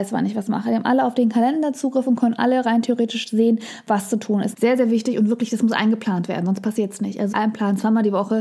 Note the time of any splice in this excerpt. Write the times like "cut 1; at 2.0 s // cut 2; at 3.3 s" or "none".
cut 1; at 4.5 s // cut 2; at 7.3 s